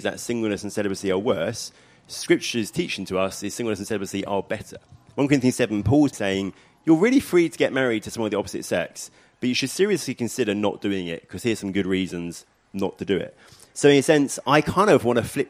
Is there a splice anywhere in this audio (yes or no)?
yes